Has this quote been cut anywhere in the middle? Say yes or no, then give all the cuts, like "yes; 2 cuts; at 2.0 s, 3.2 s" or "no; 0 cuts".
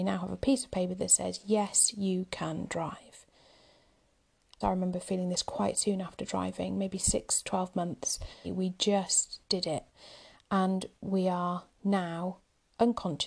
yes; 2 cuts; at 4.6 s, 8.4 s